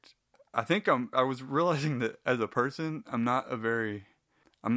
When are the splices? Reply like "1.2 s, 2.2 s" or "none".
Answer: 1.1 s